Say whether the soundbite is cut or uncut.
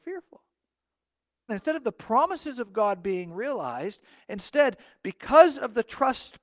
cut